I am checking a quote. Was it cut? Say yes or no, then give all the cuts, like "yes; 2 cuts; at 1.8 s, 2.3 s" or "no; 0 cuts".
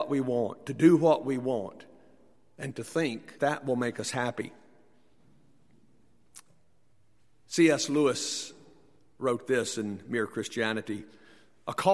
yes; 1 cut; at 3.4 s